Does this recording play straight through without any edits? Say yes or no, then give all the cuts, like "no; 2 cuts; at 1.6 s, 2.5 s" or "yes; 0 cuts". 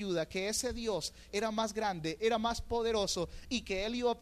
no; 1 cut; at 1.3 s